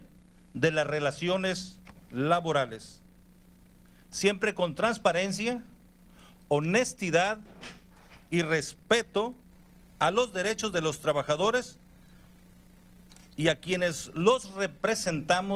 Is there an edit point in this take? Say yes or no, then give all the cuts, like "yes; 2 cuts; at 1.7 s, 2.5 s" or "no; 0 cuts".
no; 0 cuts